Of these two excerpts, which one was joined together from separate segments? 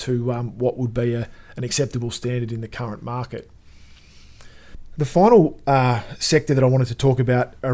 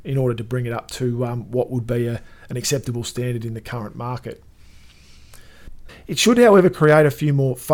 second; 1 cut; at 5.9 s

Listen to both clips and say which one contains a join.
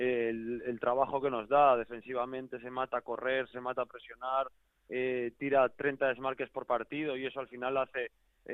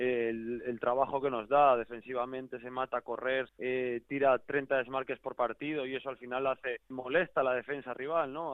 second; 2 cuts; at 3.5 s, 6.9 s

